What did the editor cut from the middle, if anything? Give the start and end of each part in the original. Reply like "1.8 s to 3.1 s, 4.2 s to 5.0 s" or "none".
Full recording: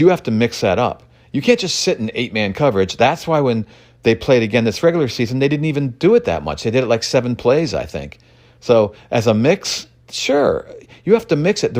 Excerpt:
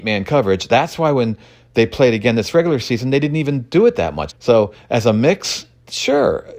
6.6 s to 8.5 s